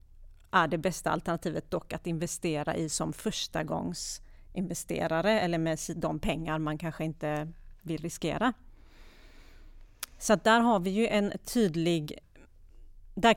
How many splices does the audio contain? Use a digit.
0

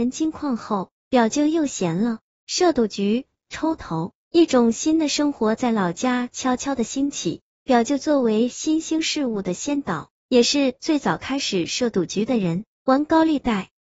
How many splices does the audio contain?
1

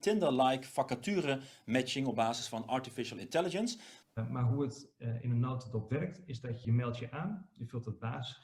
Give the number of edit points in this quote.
2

